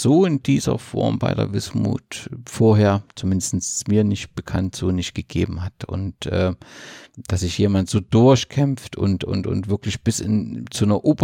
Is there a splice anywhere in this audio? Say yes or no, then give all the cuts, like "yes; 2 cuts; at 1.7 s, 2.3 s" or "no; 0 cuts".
no; 0 cuts